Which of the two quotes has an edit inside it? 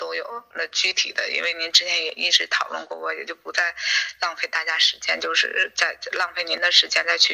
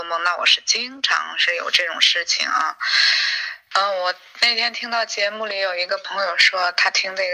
second; 1 cut; at 3.7 s

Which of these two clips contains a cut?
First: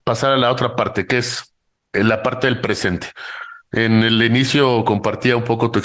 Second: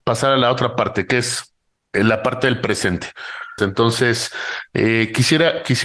second; 1 cut; at 3.6 s

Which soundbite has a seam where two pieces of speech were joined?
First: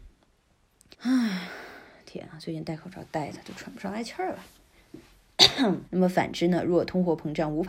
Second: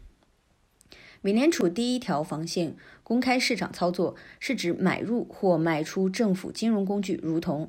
first; 2 cuts; at 0.9 s, 5.8 s

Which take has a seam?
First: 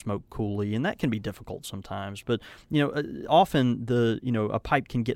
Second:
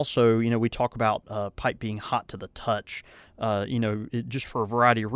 second; 1 cut; at 3.2 s

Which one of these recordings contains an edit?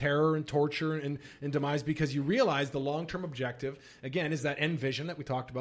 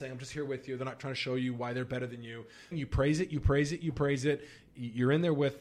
second; 1 cut; at 2.7 s

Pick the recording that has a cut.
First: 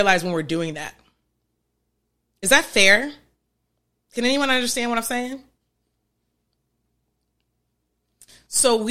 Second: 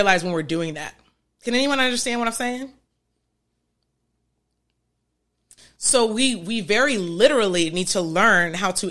second; 1 cut; at 1.3 s

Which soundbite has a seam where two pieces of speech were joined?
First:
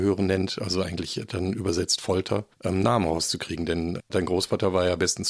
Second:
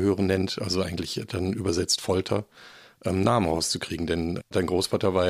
first; 1 cut; at 2.5 s

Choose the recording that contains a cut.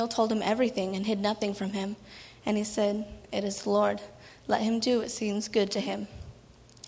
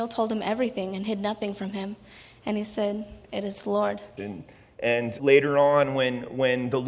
second; 2 cuts; at 4.2 s, 5.2 s

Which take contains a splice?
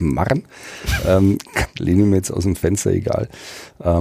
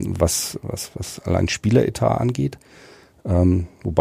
first; 1 cut; at 1.7 s

